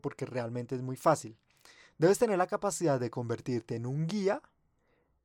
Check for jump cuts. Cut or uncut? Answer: uncut